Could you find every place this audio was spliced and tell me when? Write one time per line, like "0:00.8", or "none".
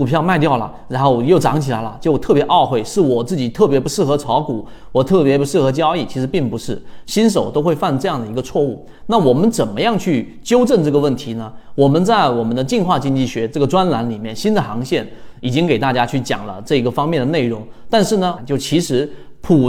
0:18.4